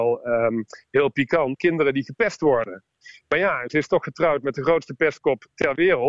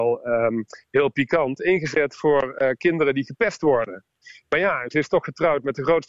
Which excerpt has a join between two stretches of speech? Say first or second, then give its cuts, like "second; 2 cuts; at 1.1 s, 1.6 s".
first; 1 cut; at 1.6 s